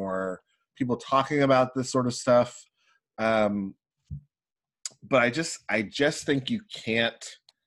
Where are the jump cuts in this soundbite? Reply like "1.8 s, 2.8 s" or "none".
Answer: none